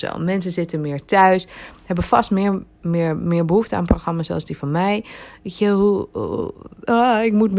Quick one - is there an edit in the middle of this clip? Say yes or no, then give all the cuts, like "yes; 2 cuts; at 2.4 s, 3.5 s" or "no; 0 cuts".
no; 0 cuts